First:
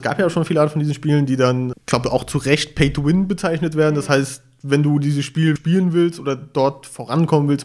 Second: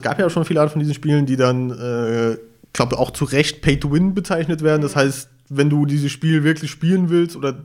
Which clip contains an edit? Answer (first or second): first